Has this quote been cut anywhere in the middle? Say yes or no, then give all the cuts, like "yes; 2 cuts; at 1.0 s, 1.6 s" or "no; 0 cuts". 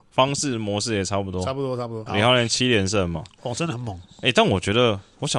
yes; 1 cut; at 2.1 s